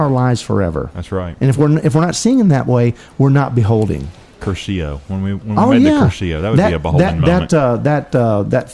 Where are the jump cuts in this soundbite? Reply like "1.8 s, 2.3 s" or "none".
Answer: none